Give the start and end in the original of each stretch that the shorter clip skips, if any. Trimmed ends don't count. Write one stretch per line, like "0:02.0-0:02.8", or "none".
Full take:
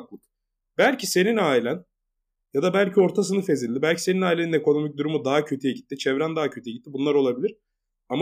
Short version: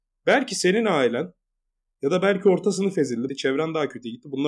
0:03.8-0:05.9